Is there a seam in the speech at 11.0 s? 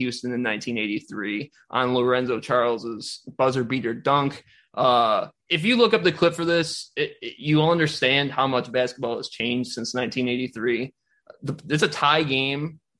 no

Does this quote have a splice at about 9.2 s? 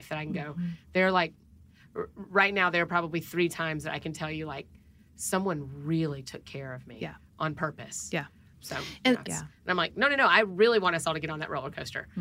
yes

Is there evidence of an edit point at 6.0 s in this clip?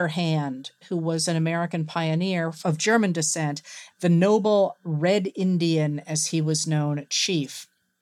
no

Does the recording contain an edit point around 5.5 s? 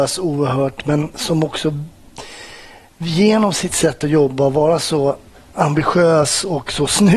yes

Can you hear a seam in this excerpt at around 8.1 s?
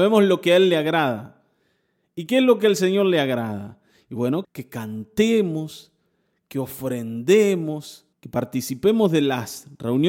yes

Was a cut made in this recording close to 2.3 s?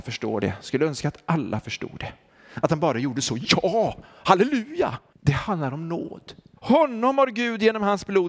no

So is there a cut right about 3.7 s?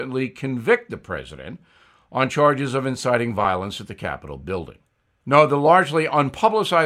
no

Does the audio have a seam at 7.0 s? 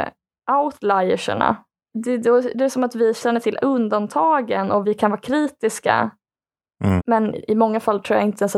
yes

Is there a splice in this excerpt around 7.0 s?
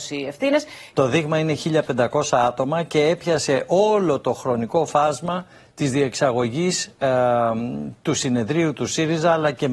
no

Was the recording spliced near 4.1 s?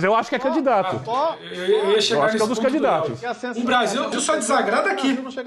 yes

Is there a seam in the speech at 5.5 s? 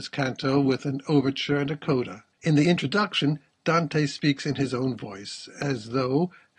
no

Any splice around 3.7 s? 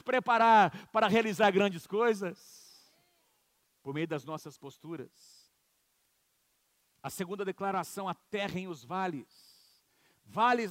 yes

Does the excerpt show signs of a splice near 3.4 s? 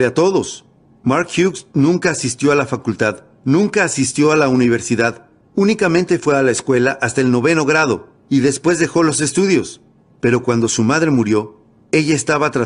no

